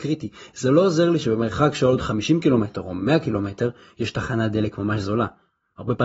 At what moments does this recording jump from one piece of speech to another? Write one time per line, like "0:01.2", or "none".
none

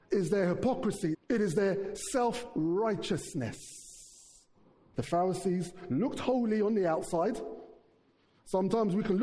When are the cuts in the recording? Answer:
0:01.1
0:04.9

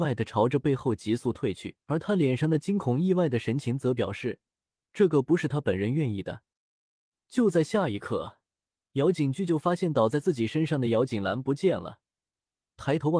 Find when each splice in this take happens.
0:01.8

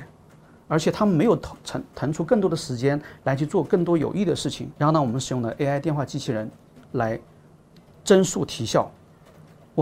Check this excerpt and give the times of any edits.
0:04.7

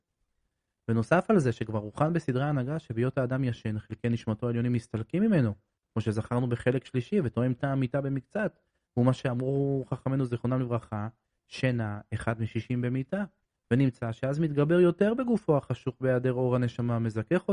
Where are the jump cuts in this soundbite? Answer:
none

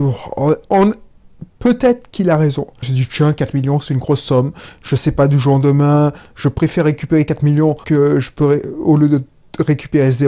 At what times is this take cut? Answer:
0:02.8
0:07.8

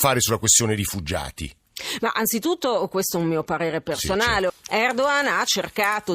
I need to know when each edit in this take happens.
0:04.5

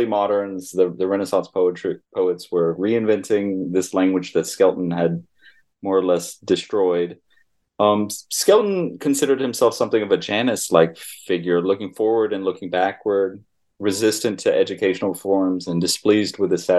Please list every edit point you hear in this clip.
0:02.8

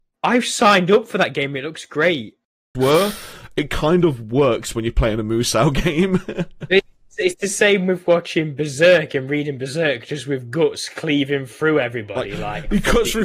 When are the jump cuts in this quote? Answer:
0:02.7

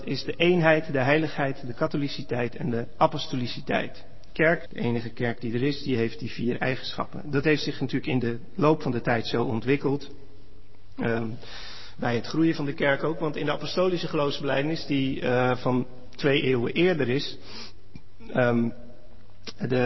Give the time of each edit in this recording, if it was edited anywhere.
0:04.7

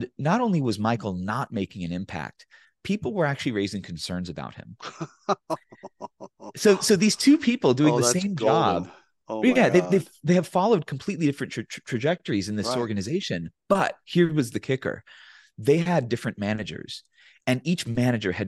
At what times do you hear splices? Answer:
none

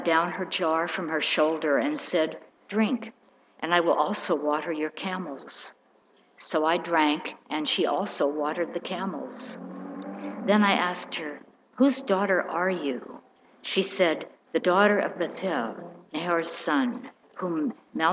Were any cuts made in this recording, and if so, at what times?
none

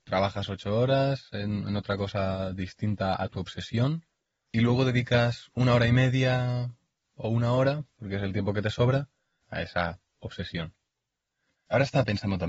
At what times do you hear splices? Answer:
0:11.5

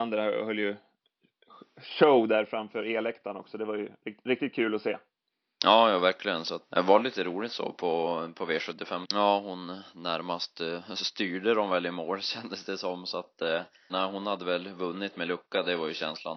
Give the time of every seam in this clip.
0:06.7
0:09.0
0:13.9

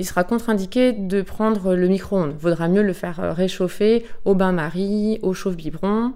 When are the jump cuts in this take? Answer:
none

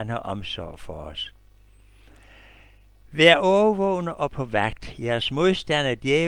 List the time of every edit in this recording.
none

